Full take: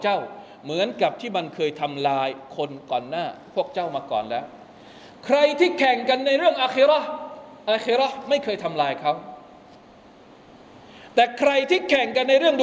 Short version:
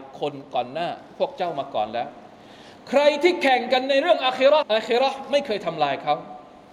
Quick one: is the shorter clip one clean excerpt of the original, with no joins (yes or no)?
no